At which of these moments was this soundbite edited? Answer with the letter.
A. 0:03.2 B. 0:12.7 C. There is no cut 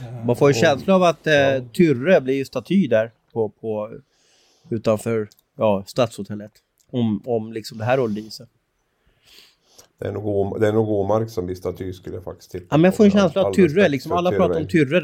C